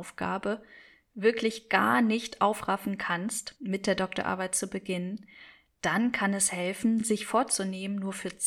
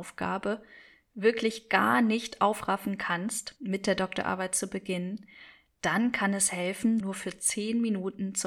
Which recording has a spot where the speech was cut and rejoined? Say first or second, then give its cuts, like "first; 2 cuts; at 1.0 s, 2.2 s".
second; 1 cut; at 7.0 s